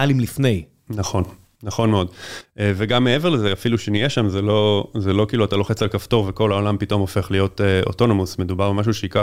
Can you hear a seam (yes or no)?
no